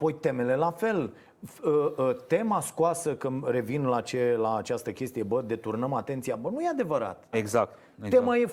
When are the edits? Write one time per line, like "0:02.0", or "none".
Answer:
0:07.3